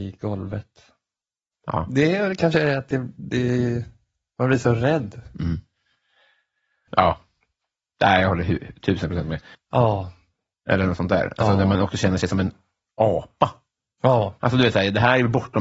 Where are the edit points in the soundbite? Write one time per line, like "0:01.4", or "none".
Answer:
0:01.5
0:06.9
0:09.5